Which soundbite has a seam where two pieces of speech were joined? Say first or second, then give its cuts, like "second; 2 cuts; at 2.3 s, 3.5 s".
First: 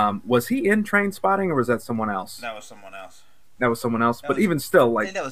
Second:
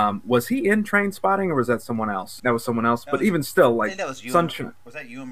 second; 1 cut; at 2.4 s